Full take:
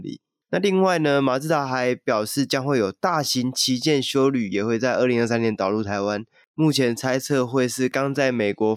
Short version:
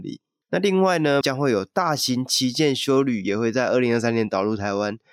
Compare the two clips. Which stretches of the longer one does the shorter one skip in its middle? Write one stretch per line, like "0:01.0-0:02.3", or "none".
0:01.2-0:02.5